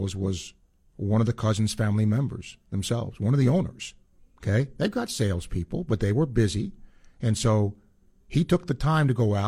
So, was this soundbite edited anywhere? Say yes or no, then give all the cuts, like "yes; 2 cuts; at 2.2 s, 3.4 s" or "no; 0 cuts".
yes; 1 cut; at 4.2 s